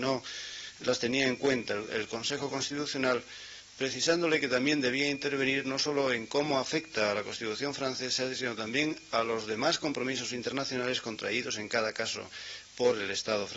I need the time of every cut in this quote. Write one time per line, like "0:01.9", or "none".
0:01.9